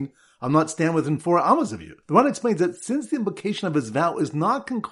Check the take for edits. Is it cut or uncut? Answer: cut